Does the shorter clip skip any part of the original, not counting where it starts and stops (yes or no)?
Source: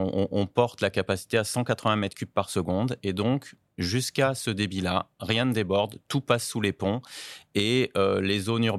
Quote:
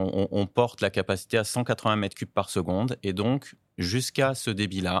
no